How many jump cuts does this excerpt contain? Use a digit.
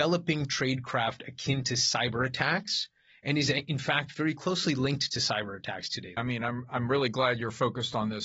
1